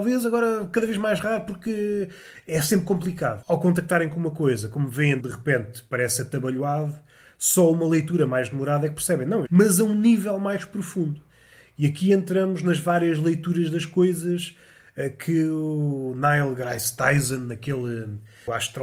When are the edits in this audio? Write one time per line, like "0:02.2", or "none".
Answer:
0:03.4
0:09.5